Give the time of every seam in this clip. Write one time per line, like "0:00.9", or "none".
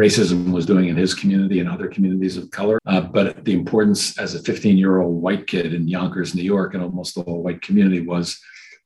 0:02.8

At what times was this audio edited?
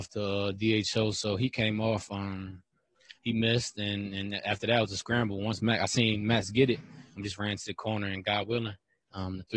0:07.2

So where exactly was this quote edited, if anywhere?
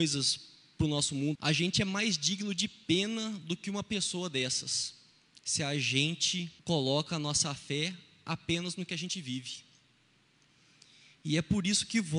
0:01.4
0:06.6

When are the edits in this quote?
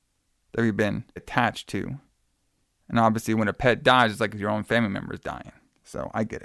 0:01.2

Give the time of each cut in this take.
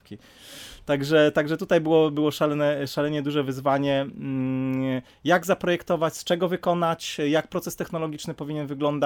none

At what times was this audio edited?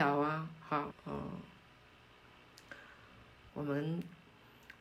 0:00.9
0:03.5

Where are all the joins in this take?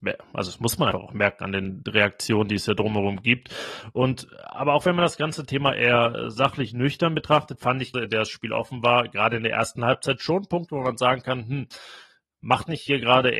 0:00.9
0:07.9

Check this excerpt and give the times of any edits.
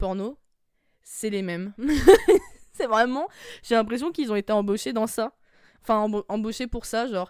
none

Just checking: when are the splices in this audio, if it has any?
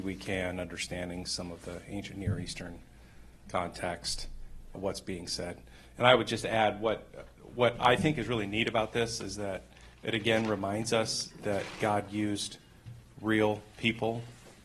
0:04.7

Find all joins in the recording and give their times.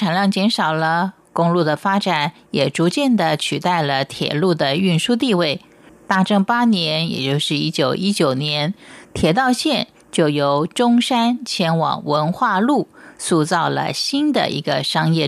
0:05.9

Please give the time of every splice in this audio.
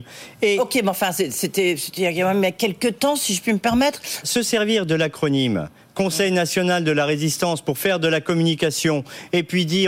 0:04.2

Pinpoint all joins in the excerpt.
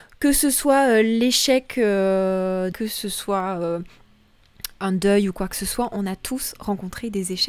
0:02.7

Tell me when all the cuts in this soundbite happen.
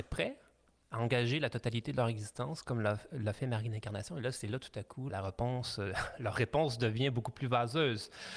0:05.1

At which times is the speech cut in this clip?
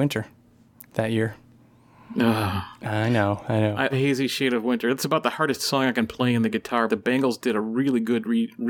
0:03.9
0:06.9

